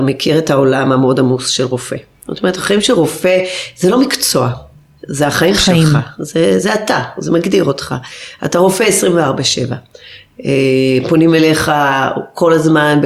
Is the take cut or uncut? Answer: uncut